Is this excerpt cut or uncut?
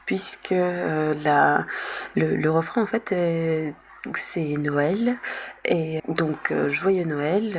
cut